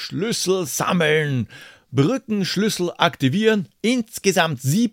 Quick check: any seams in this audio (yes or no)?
yes